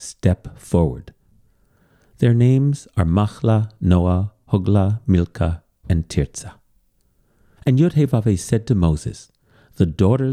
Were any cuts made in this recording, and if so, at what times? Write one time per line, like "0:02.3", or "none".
0:07.6

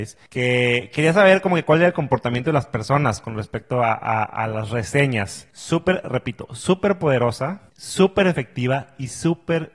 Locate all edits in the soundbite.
0:05.5

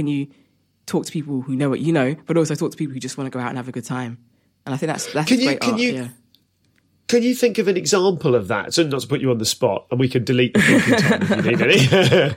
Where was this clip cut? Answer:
none

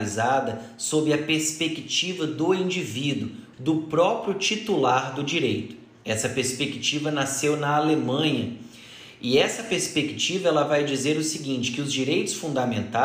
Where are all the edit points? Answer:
0:03.5
0:06.0

